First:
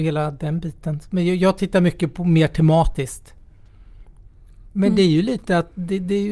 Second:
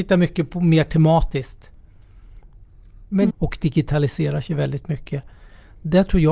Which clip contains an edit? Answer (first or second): second